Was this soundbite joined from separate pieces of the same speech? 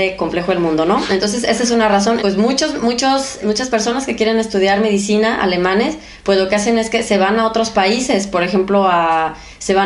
yes; 2 cuts; at 2.2 s, 3.4 s

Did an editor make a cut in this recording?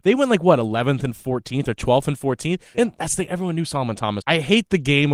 yes; 2 cuts; at 2.7 s, 4.2 s

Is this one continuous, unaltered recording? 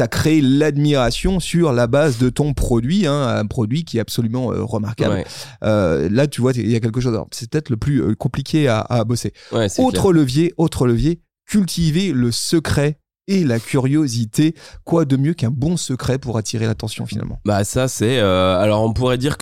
yes; 0 cuts

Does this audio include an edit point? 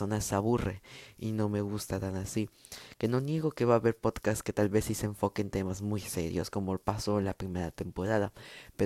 no; 0 cuts

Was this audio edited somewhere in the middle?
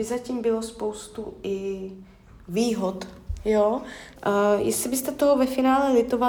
yes; 1 cut; at 4.2 s

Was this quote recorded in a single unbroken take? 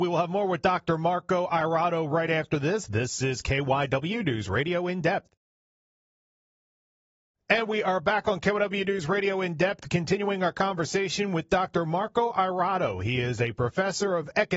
yes; 0 cuts

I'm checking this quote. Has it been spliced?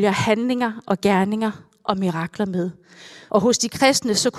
yes; 1 cut; at 3.3 s

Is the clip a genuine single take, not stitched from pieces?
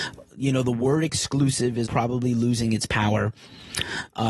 no; 1 cut; at 1.9 s

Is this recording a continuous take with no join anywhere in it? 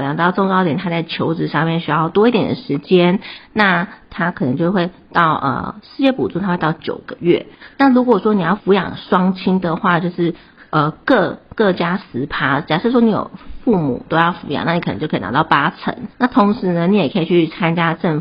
no; 2 cuts; at 8.6 s, 16.1 s

